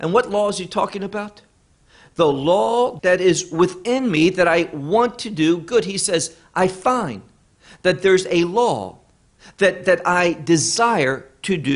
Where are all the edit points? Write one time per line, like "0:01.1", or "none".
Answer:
0:03.0